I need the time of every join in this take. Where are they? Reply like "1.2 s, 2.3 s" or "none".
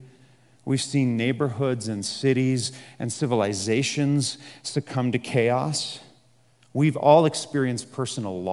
none

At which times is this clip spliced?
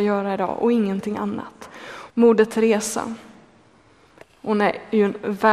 2.1 s

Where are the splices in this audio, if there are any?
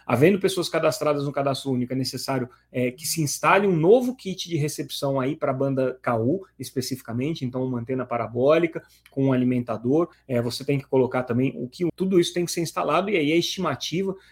10.1 s, 11.9 s

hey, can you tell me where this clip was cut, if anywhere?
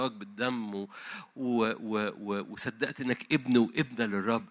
none

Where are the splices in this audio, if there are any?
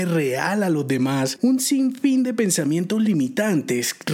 1.4 s

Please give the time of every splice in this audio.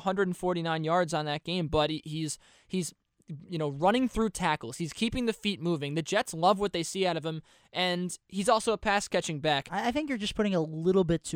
none

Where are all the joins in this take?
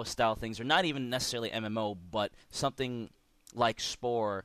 2.4 s

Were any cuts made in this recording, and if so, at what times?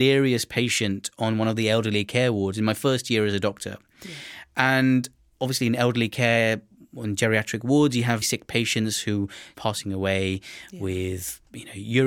8.2 s, 9.5 s

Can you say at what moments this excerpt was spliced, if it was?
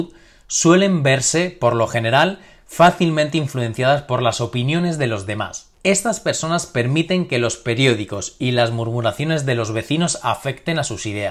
5.7 s

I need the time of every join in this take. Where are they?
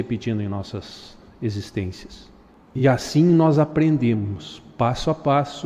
none

